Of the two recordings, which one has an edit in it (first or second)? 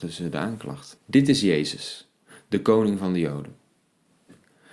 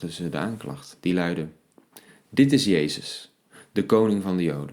first